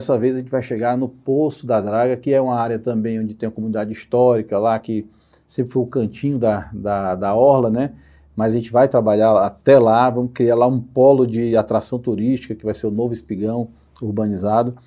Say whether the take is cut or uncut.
uncut